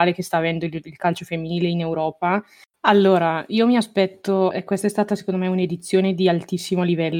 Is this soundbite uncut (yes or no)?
no